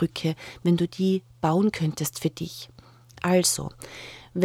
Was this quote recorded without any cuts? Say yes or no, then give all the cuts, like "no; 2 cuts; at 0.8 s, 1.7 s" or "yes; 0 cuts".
yes; 0 cuts